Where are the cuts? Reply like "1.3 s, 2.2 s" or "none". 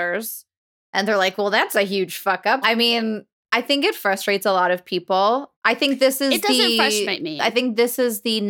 2.6 s, 5.5 s